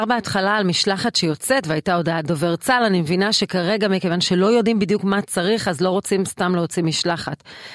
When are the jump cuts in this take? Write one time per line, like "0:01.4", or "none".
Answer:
none